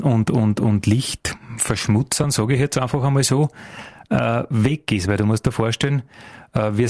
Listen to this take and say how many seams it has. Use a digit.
0